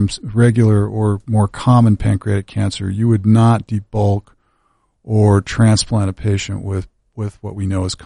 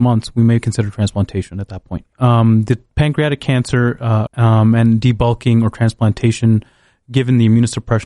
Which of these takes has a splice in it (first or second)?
second